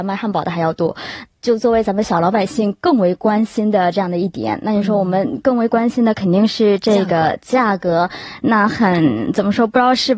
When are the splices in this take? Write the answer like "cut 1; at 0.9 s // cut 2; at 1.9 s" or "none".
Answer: cut 1; at 1.2 s